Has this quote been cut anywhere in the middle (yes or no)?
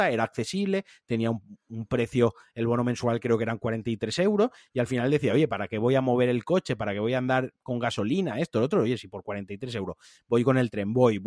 no